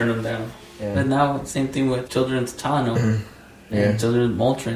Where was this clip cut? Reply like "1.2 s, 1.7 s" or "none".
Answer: 0.9 s, 2.1 s